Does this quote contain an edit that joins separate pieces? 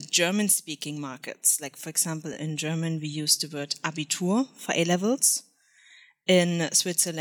no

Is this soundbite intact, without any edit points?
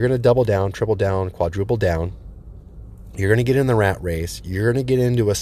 yes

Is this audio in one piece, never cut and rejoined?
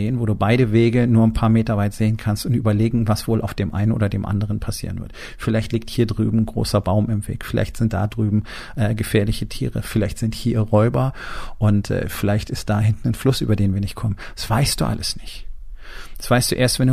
yes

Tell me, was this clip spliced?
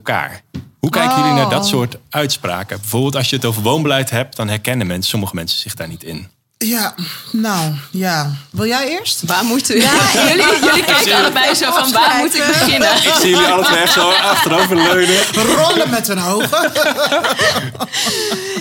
no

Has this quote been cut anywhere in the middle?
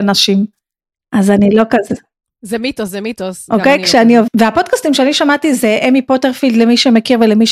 yes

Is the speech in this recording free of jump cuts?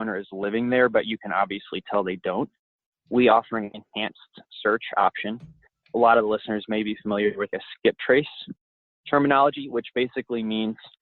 yes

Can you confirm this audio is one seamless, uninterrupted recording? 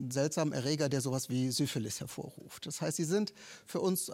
yes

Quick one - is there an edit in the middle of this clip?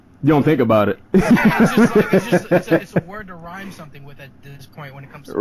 no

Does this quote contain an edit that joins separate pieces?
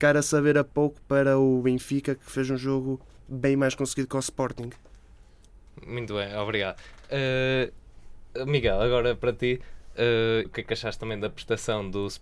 yes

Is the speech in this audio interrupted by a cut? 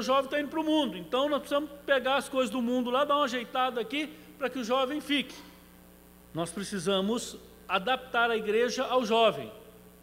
yes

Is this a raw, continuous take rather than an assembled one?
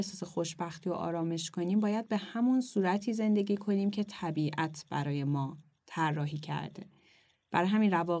yes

